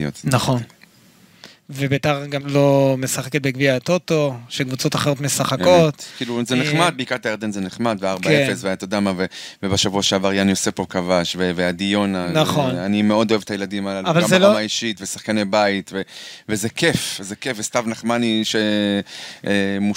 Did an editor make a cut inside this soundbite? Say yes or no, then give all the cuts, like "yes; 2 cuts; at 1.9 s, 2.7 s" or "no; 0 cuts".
yes; 1 cut; at 2.4 s